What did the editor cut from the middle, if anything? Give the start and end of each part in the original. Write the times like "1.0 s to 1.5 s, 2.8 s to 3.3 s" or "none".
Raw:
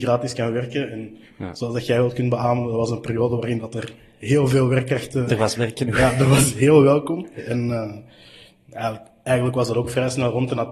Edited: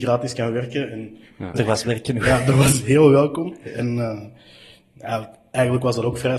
1.5 s to 5.3 s